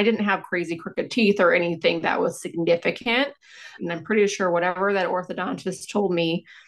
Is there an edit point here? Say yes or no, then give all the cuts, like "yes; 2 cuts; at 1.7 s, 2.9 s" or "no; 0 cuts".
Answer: yes; 1 cut; at 3.8 s